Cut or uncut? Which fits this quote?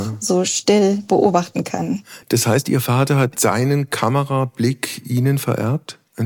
uncut